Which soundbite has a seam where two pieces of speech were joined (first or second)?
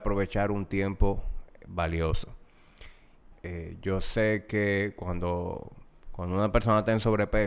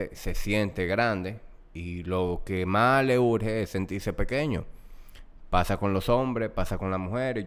first